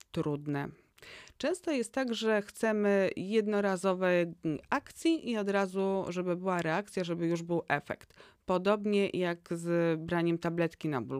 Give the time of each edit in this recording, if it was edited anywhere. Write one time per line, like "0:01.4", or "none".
none